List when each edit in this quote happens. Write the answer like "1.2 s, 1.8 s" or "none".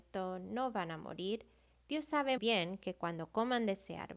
2.4 s